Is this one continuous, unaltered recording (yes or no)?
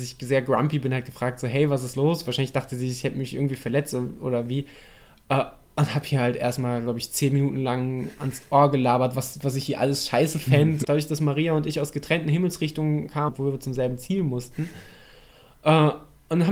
no